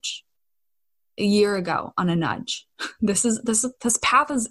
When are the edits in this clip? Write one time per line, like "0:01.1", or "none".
none